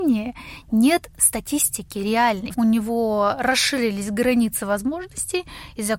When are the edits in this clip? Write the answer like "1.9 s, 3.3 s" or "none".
2.5 s